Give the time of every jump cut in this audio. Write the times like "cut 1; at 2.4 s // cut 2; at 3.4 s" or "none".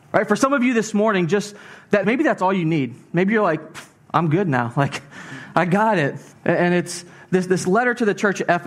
cut 1; at 2.0 s // cut 2; at 6.3 s